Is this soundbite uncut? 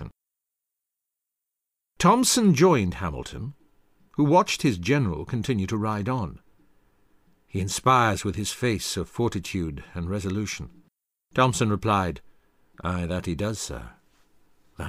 yes; 0 cuts

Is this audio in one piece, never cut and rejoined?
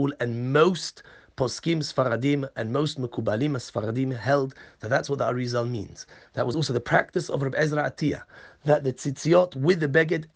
yes; 0 cuts

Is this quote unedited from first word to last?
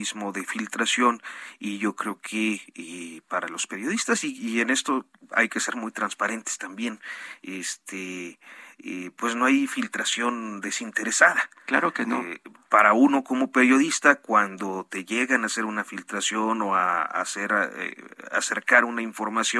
yes; 0 cuts

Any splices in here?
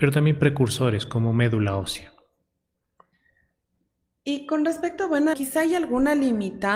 yes; 1 cut; at 5.3 s

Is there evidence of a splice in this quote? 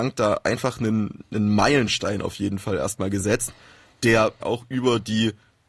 yes; 1 cut; at 4.4 s

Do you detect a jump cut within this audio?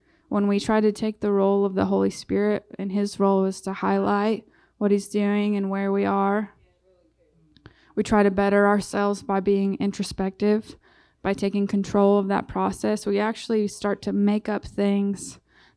no; 0 cuts

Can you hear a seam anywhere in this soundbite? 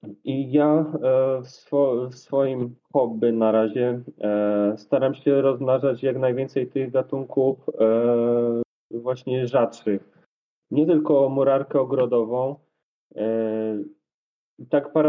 no; 0 cuts

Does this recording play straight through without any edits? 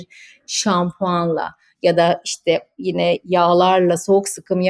yes; 0 cuts

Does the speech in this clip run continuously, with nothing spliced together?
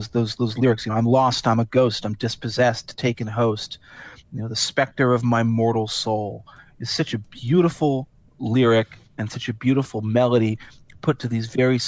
yes; 0 cuts

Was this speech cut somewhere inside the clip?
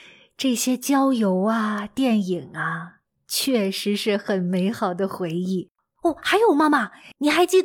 yes; 1 cut; at 5.9 s

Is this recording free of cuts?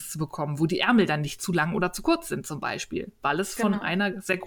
yes; 0 cuts

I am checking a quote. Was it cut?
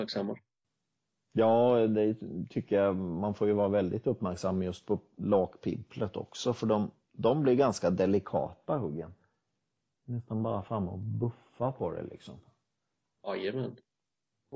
yes; 1 cut; at 9.9 s

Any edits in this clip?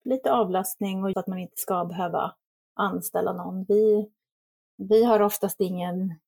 yes; 1 cut; at 1.1 s

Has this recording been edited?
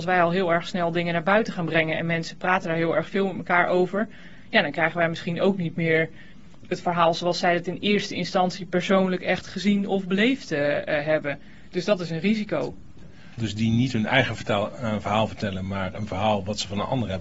yes; 1 cut; at 13.4 s

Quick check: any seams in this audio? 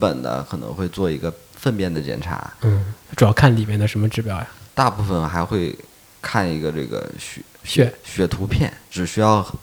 yes; 1 cut; at 4.7 s

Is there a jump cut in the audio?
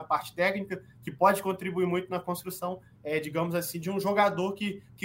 yes; 1 cut; at 2.9 s

